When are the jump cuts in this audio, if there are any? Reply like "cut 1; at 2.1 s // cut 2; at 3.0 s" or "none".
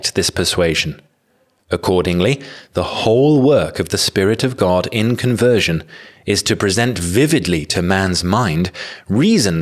cut 1; at 1.6 s